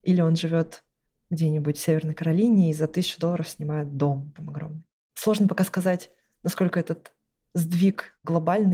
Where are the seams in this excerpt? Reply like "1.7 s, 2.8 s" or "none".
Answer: none

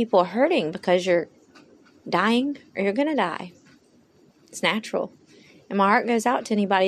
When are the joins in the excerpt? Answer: none

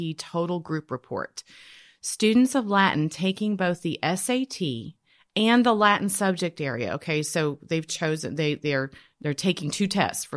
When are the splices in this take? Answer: none

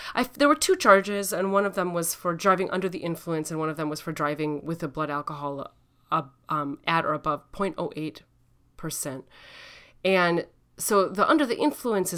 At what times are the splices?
none

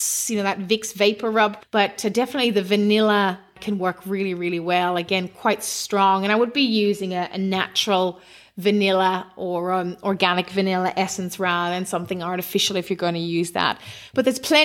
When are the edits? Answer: 1.6 s

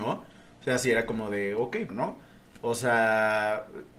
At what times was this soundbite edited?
1.9 s

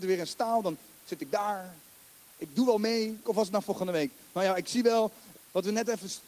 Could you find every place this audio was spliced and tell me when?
3.2 s, 5.3 s

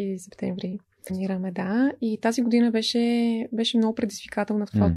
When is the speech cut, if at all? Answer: 1.1 s

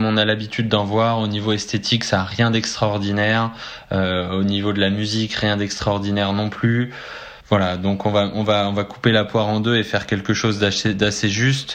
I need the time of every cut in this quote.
7.4 s

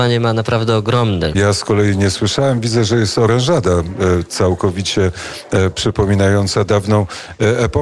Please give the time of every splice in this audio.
1.3 s

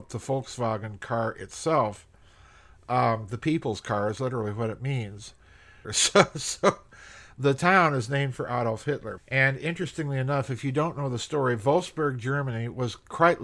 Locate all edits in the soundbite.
5.8 s, 9.2 s

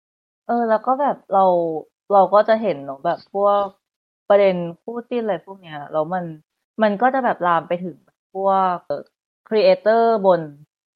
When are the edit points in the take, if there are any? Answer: 8.9 s

